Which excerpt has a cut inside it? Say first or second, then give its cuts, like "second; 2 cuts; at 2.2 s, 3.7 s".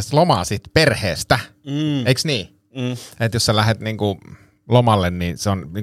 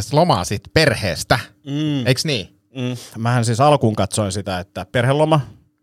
second; 1 cut; at 3.1 s